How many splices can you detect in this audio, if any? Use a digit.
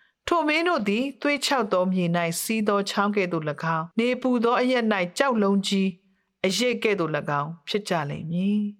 1